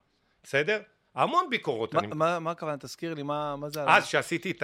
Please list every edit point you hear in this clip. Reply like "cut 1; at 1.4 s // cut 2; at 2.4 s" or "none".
none

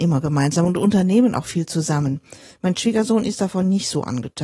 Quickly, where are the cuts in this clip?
none

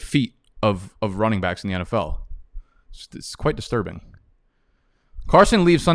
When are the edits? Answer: none

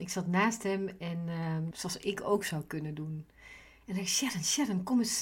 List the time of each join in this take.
cut 1; at 1.7 s

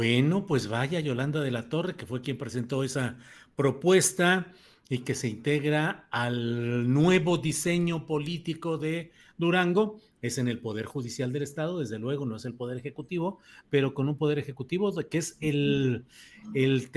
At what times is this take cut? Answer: none

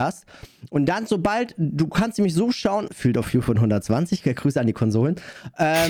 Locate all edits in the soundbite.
cut 1; at 2.9 s

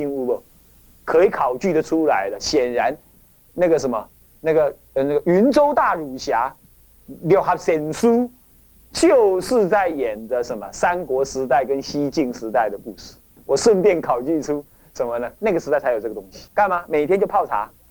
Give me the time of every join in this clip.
cut 1; at 13.4 s // cut 2; at 15.4 s // cut 3; at 16.5 s

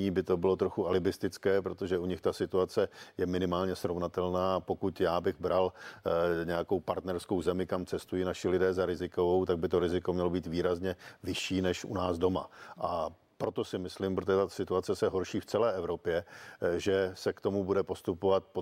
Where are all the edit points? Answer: none

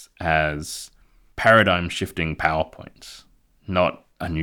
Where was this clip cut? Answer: none

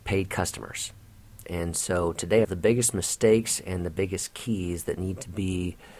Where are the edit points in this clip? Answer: cut 1; at 1.4 s // cut 2; at 2.4 s

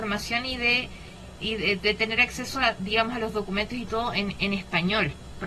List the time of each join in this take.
cut 1; at 1.4 s

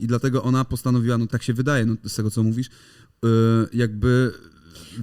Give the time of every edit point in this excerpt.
cut 1; at 1.3 s

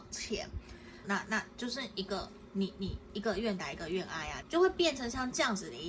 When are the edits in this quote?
cut 1; at 1.0 s // cut 2; at 4.4 s

